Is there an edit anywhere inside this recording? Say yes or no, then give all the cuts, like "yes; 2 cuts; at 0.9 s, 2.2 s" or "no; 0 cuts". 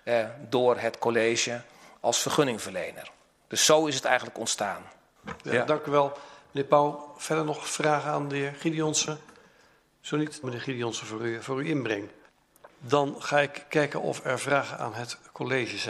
yes; 3 cuts; at 5.4 s, 10.4 s, 12.7 s